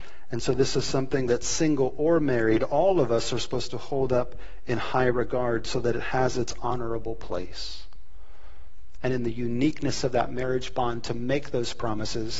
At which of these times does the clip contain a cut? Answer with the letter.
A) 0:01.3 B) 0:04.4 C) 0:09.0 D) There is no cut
C